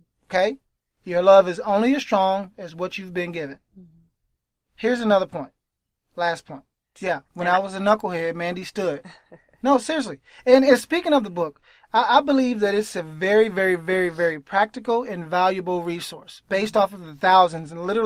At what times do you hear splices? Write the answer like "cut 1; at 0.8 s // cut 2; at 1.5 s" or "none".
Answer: cut 1; at 6.9 s